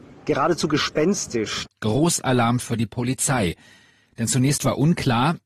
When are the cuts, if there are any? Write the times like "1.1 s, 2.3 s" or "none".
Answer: 1.7 s

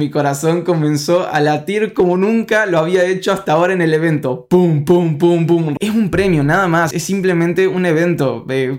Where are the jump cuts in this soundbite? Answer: 5.8 s, 6.9 s

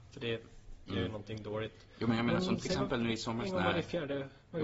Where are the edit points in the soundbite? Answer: none

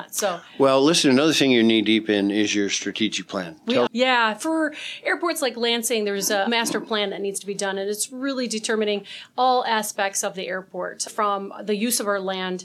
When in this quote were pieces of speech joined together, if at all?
3.9 s

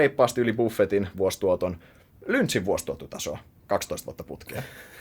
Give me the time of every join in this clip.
none

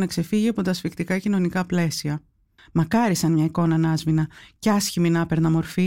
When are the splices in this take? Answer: 2.6 s

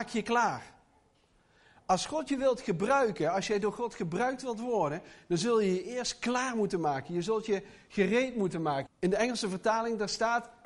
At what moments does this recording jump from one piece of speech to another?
8.9 s

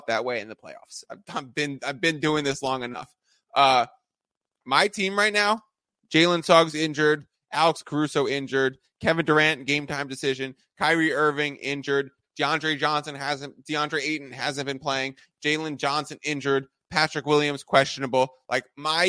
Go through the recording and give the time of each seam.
12.2 s

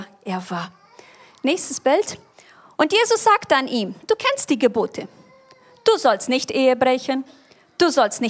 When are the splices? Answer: none

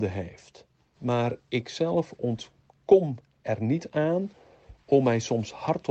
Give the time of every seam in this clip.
0.9 s

